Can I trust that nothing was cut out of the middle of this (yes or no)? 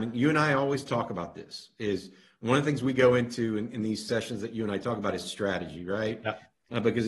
yes